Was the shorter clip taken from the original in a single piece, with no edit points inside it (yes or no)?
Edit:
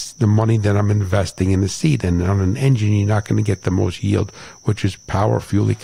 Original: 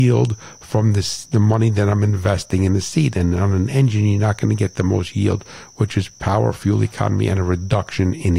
yes